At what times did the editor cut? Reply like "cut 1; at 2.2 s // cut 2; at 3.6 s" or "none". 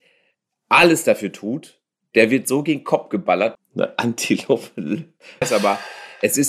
cut 1; at 3.5 s // cut 2; at 5.4 s